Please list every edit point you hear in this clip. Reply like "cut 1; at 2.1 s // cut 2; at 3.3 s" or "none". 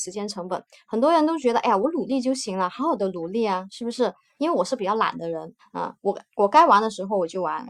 cut 1; at 4.4 s // cut 2; at 5.6 s